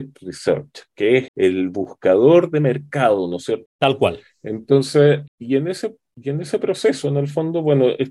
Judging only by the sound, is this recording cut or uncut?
cut